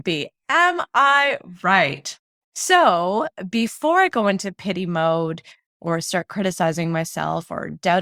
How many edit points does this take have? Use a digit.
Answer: 0